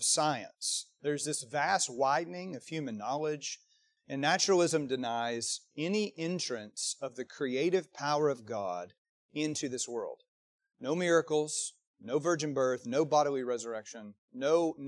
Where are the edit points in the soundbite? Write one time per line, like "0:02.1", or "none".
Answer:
0:04.0